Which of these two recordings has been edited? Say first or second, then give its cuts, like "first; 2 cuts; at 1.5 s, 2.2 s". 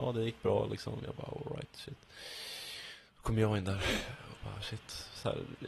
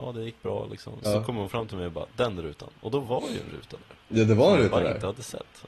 second; 1 cut; at 1.0 s